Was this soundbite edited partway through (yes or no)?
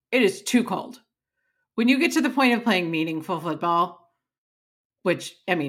no